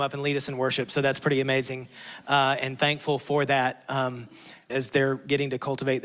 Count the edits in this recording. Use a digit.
1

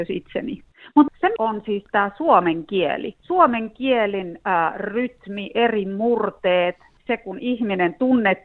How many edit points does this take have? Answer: 1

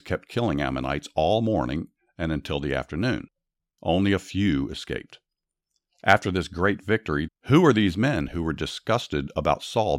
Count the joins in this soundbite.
1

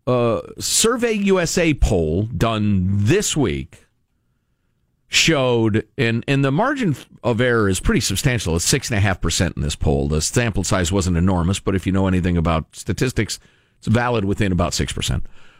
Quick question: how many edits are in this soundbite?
0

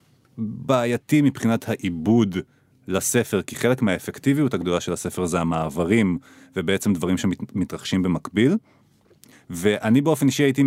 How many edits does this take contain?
1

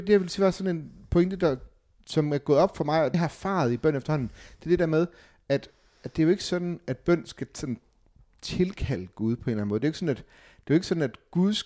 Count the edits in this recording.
1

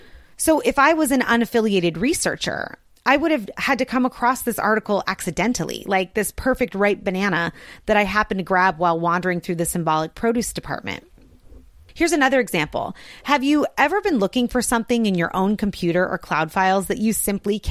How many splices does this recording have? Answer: 0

